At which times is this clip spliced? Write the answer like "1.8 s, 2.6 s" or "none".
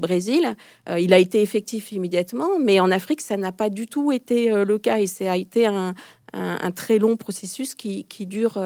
none